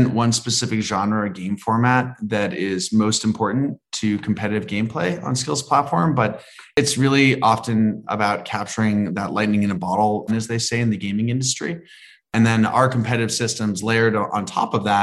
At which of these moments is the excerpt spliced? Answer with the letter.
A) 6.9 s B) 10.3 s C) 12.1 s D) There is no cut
B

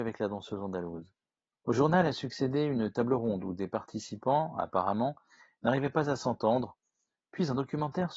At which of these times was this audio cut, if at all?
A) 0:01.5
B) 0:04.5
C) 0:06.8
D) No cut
A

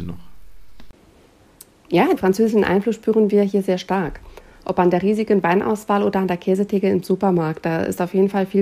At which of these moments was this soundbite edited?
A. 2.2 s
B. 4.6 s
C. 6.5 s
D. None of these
A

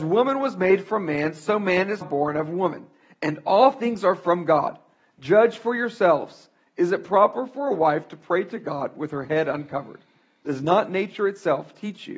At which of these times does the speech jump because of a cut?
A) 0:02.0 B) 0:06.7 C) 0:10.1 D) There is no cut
A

